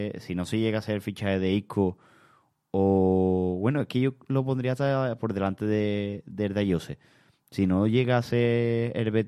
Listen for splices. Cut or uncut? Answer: uncut